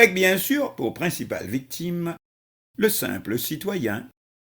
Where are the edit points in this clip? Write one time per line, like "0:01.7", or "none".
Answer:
none